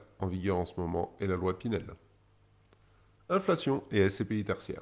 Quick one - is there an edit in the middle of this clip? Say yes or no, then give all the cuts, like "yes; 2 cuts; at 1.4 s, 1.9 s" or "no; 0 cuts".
no; 0 cuts